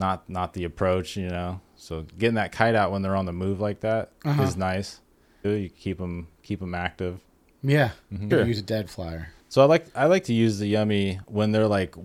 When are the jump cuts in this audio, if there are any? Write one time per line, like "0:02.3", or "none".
0:05.4
0:08.3
0:09.4